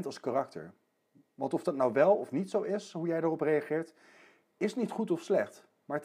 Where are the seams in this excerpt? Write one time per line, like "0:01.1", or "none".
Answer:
none